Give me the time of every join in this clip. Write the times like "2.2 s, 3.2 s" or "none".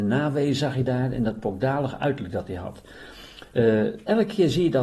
none